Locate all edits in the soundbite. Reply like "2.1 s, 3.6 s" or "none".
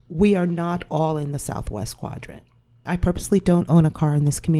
2.9 s